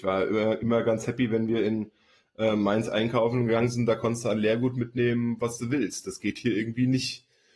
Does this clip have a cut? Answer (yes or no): no